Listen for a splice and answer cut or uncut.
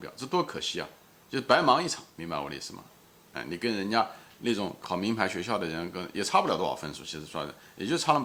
uncut